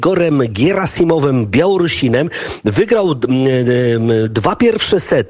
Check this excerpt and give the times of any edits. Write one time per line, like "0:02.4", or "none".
none